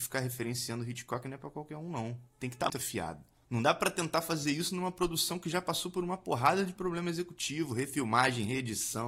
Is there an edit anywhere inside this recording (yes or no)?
yes